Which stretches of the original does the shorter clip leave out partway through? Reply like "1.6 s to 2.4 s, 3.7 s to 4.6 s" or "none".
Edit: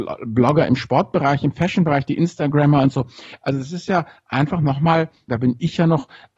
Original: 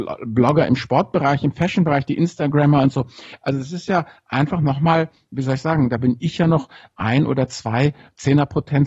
5.3 s to 5.9 s